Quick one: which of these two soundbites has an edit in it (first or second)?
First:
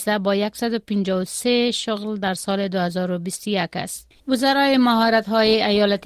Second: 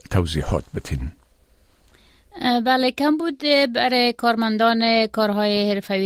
first